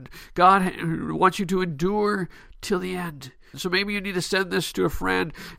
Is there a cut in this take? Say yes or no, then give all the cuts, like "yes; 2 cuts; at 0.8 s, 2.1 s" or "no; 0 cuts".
yes; 1 cut; at 3.5 s